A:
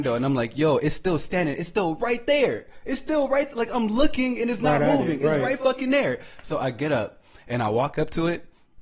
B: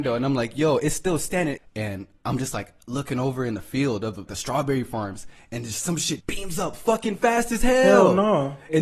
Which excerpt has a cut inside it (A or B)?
B